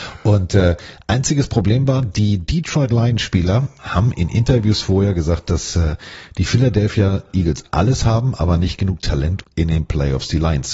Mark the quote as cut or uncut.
cut